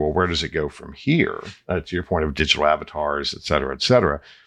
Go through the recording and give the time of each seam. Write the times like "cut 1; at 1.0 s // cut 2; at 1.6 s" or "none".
none